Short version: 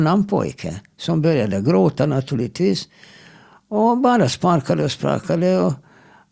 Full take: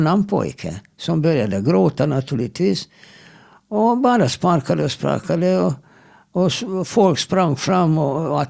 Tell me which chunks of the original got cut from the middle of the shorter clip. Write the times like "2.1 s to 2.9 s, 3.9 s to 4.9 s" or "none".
none